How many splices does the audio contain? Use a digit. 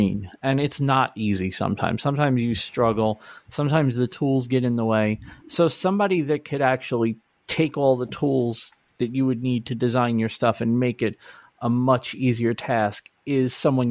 0